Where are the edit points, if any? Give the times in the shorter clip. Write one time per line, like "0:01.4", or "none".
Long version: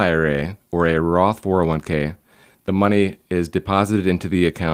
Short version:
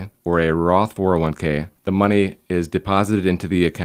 0:01.8

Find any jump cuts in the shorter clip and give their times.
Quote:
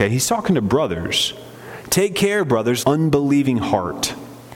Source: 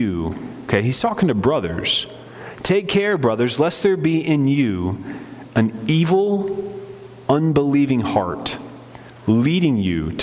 0:02.8

